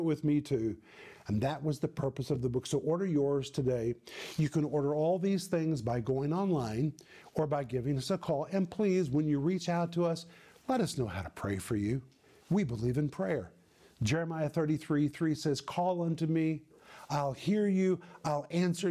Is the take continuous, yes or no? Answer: yes